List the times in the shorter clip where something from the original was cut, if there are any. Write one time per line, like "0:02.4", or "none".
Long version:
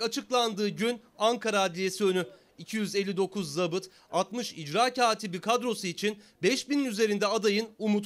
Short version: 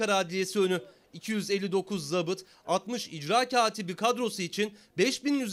none